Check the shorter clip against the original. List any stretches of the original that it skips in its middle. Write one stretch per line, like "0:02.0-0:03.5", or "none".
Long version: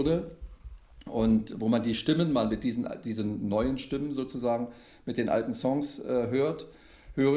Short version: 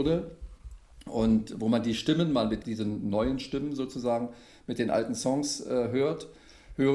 0:02.6-0:03.0